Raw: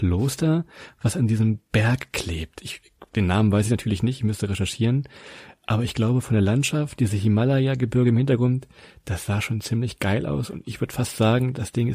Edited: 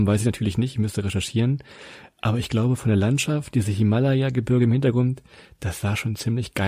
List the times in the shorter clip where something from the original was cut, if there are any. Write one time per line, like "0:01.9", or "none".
none